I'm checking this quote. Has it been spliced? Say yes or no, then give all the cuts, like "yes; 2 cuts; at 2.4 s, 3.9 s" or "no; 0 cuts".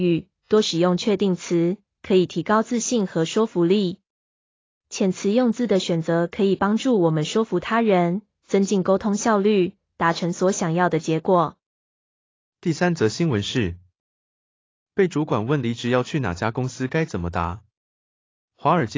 no; 0 cuts